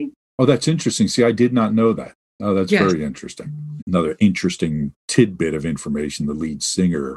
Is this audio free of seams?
no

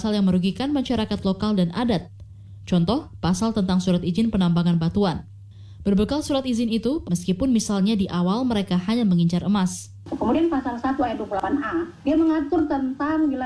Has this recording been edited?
yes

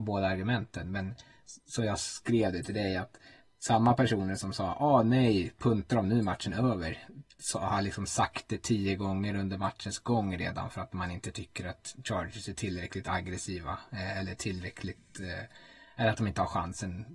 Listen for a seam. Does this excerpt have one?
no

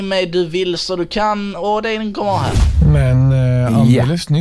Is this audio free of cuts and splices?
yes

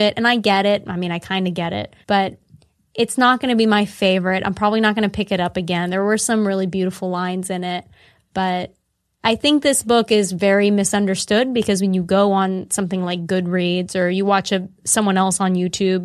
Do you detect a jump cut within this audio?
yes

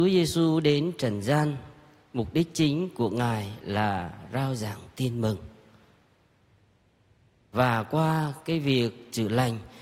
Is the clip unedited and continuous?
yes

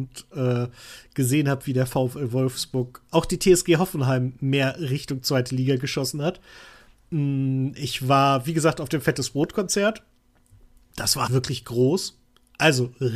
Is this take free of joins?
no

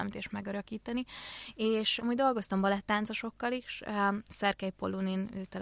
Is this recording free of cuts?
no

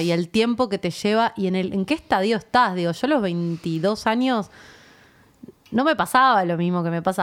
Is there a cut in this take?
no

